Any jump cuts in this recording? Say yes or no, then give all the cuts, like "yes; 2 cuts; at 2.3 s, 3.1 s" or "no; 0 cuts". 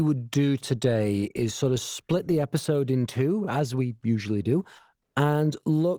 no; 0 cuts